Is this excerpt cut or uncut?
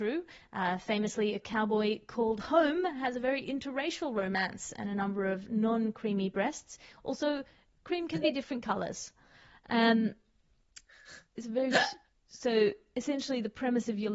uncut